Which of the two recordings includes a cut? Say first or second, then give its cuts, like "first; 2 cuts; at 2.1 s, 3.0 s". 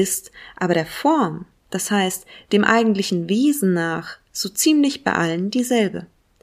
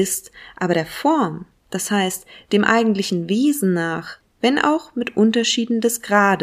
second; 1 cut; at 4.2 s